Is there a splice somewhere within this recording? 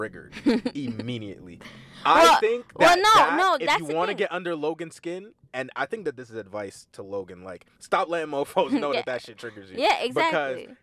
yes; 1 cut; at 7.7 s

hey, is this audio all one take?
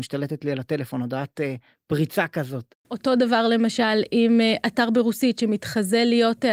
no; 1 cut; at 2.8 s

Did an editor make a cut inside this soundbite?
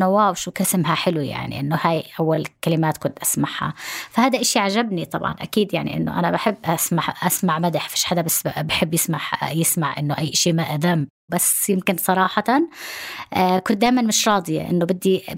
no; 0 cuts

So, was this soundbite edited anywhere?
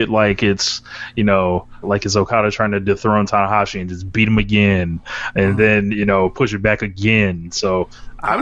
yes; 1 cut; at 1.8 s

